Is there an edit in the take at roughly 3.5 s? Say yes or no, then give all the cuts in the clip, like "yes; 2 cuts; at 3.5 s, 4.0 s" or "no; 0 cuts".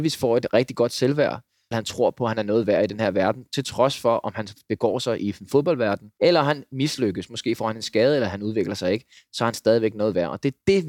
no; 2 cuts; at 1.7 s, 6.2 s